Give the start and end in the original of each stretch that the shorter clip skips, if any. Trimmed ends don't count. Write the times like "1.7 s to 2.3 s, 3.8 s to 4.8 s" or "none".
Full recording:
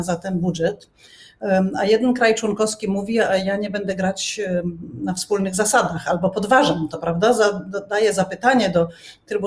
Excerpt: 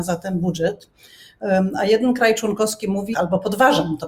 3.1 s to 6.0 s